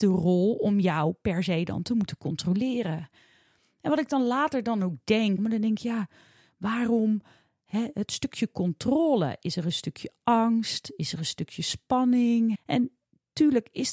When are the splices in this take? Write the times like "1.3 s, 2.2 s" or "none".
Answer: 5.4 s, 12.5 s